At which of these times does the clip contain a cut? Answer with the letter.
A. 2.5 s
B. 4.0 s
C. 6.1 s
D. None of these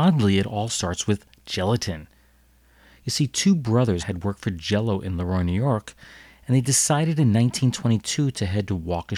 B